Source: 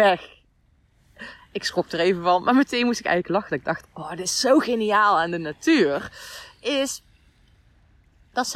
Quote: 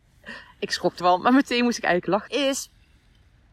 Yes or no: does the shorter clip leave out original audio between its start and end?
yes